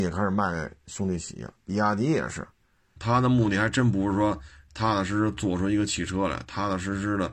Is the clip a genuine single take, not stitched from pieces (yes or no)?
no